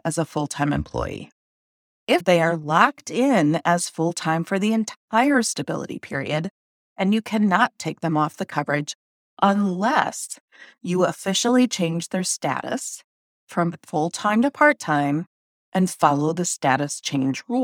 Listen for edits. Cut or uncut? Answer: cut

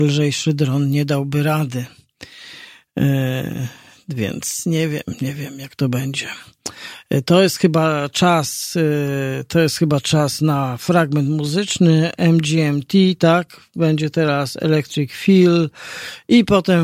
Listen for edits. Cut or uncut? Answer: uncut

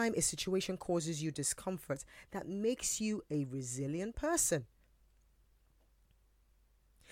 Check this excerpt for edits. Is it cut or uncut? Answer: uncut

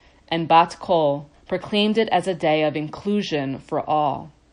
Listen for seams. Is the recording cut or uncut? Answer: cut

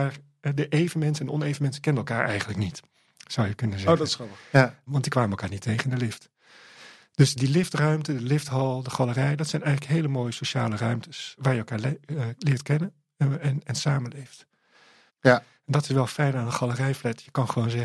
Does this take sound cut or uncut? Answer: cut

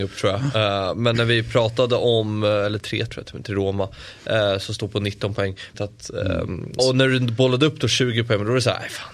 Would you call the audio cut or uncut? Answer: cut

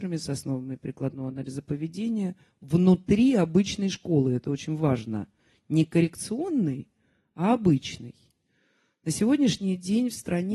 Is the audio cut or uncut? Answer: uncut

